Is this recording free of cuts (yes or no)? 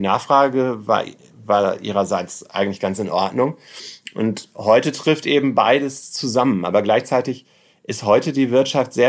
yes